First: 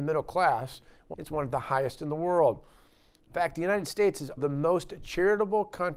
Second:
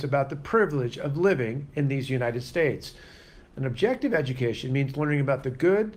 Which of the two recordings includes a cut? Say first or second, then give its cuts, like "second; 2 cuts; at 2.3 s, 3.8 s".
first; 2 cuts; at 1.1 s, 4.4 s